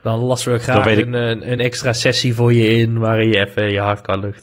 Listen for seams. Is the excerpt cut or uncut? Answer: uncut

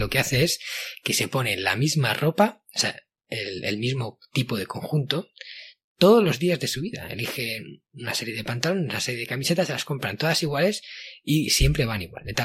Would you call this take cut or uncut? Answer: uncut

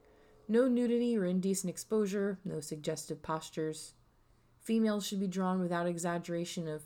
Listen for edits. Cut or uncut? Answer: uncut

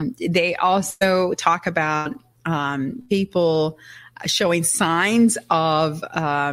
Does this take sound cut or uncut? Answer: uncut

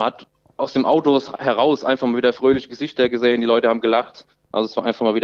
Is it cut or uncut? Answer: uncut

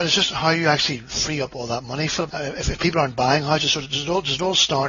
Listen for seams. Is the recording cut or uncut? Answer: cut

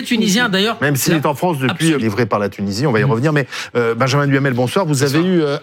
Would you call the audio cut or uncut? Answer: cut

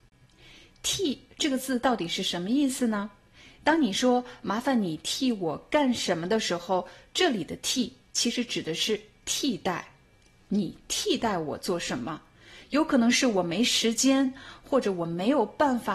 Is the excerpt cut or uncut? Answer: uncut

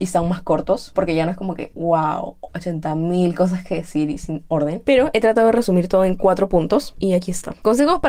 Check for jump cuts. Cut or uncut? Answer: uncut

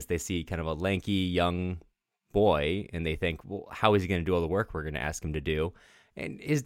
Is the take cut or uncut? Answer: uncut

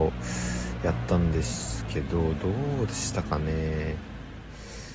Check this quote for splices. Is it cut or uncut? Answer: uncut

